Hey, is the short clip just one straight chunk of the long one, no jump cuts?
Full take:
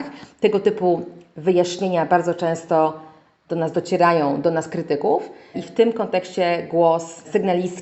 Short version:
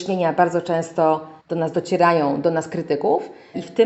no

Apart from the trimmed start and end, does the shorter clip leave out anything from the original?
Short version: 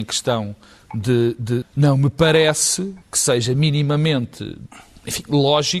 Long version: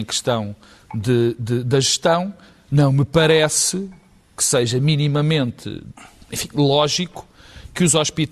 yes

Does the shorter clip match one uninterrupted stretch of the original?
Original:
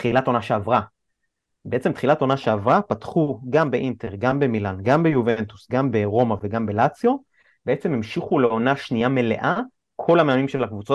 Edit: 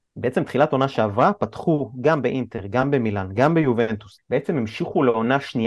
no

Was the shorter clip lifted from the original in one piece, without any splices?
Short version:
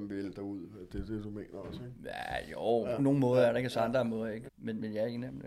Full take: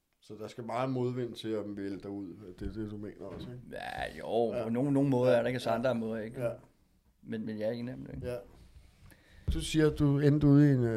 no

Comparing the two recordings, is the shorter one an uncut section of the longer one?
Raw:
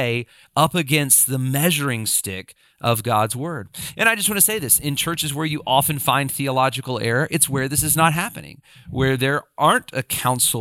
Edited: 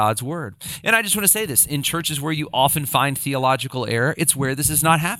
yes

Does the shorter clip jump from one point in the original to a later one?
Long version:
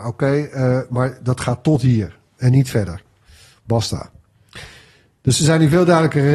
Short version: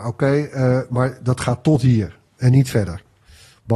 no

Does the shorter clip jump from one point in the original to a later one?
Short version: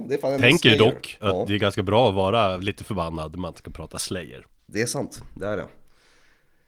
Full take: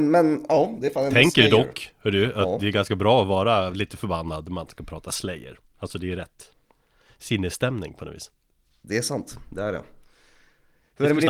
yes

